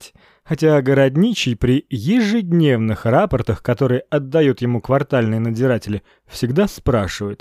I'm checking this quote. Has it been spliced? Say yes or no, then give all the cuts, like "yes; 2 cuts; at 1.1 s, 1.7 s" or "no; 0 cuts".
no; 0 cuts